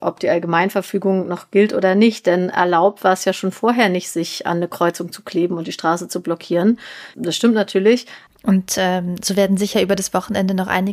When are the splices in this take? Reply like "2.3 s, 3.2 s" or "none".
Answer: 7.1 s, 8.3 s